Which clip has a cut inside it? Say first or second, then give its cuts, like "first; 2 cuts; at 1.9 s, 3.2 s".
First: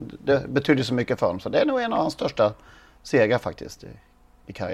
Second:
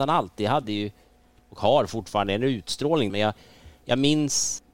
second; 1 cut; at 3.1 s